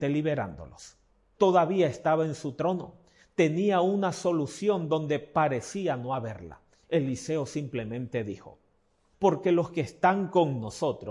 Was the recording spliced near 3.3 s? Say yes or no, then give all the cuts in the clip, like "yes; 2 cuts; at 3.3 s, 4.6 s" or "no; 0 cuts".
no; 3 cuts; at 1.3 s, 6.7 s, 9.1 s